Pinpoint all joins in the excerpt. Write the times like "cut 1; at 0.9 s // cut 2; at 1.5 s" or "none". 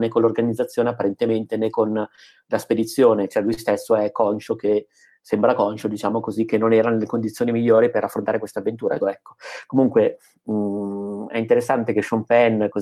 cut 1; at 9.0 s